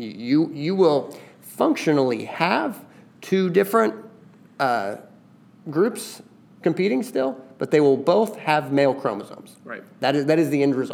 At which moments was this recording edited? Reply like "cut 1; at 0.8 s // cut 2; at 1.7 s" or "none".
none